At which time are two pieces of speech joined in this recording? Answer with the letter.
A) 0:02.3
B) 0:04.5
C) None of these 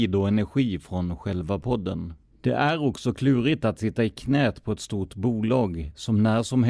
A